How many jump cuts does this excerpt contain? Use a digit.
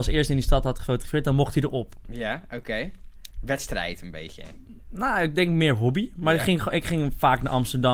1